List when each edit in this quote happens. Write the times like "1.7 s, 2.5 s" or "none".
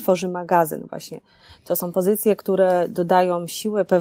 none